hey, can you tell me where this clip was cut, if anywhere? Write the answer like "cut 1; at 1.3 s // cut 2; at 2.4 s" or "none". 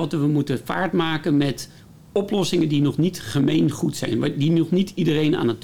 none